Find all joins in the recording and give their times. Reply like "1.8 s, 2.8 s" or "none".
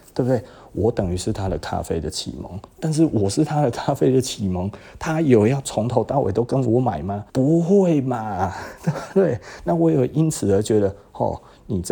7.3 s